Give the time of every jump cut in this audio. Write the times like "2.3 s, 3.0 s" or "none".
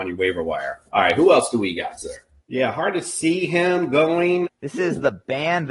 2.4 s, 4.4 s